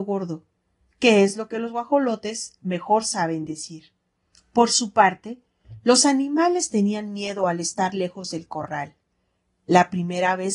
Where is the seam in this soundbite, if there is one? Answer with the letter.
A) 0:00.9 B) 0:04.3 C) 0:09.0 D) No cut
B